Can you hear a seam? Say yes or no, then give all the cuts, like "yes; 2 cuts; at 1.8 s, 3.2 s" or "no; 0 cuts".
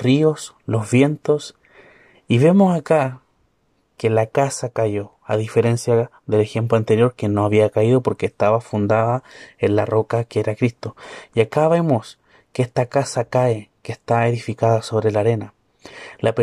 no; 0 cuts